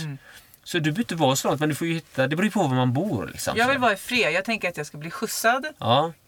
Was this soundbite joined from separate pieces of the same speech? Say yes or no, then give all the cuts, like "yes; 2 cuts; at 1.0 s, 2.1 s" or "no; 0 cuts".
no; 0 cuts